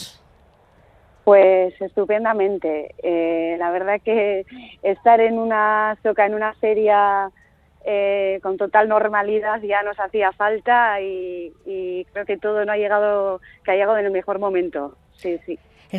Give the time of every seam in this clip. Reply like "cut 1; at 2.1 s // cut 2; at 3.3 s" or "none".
none